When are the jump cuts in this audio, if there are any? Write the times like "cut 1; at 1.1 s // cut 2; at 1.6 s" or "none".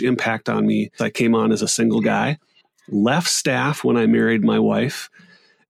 cut 1; at 1.0 s